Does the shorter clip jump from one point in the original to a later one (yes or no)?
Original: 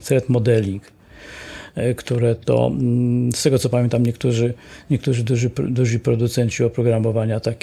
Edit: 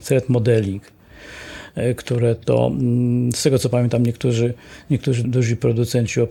yes